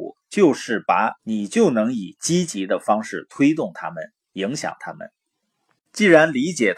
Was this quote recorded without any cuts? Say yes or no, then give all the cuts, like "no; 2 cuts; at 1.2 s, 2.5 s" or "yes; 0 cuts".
no; 1 cut; at 1.2 s